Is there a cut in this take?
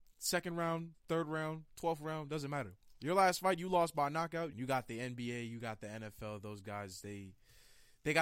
yes; 1 cut; at 4.5 s

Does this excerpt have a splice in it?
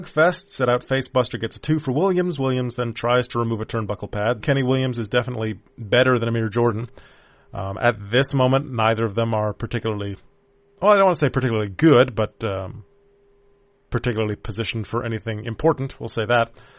yes; 1 cut; at 4.4 s

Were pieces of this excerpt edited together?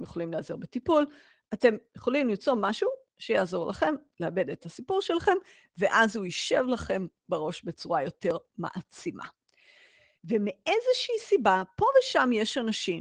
yes; 1 cut; at 10.1 s

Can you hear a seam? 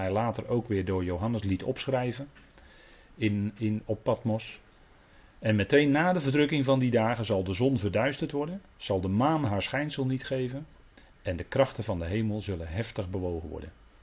yes; 1 cut; at 11.0 s

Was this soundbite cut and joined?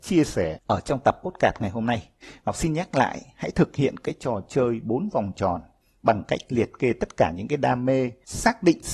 no; 0 cuts

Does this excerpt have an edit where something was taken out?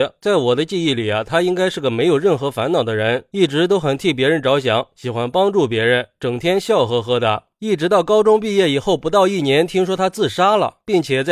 no; 0 cuts

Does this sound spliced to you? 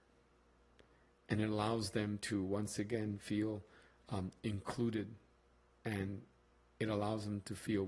no; 0 cuts

